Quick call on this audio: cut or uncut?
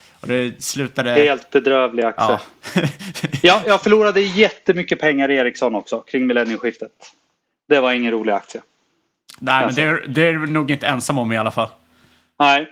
uncut